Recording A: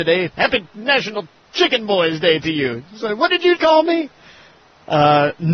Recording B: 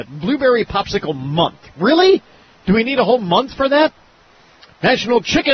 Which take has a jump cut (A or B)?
A